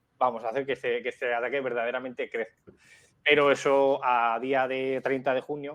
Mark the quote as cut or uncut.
uncut